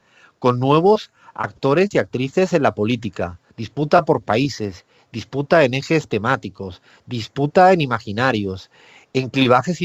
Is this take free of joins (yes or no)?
no